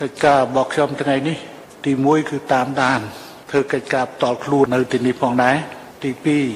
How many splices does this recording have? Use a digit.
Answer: 1